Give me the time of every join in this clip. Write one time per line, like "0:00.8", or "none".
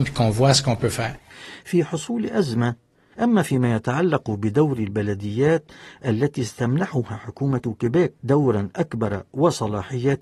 0:03.1
0:08.2